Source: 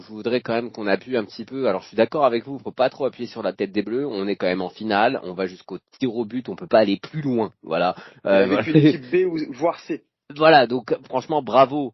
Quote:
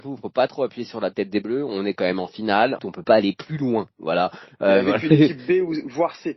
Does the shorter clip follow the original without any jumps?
no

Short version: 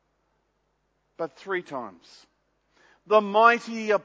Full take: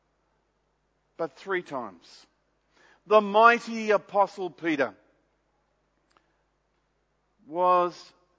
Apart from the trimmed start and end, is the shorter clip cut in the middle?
no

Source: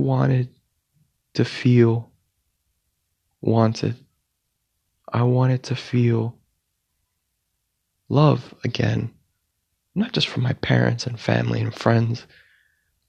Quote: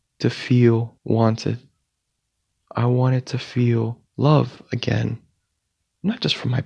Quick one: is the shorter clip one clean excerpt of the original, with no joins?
no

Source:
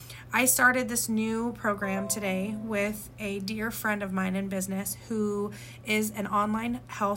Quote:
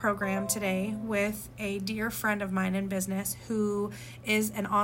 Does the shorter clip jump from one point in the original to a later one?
no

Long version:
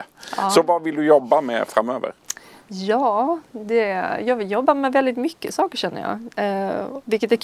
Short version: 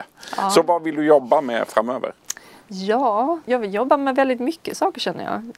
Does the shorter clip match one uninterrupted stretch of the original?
no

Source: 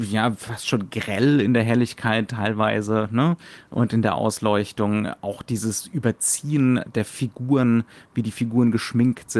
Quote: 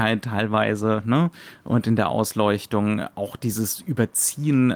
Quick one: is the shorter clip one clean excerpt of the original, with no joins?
yes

